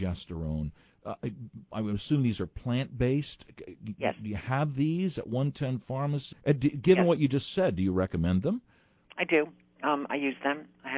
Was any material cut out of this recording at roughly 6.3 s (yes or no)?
yes